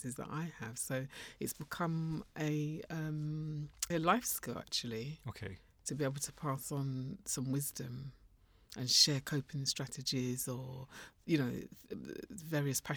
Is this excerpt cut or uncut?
cut